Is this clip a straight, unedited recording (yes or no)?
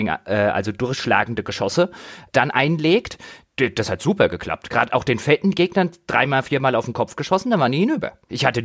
yes